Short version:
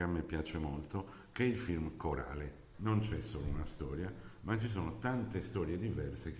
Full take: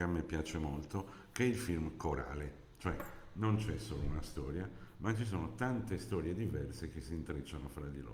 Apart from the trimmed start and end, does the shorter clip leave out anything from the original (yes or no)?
yes